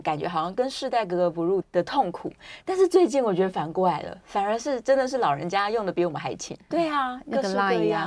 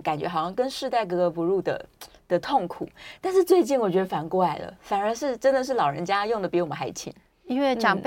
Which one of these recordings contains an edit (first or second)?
first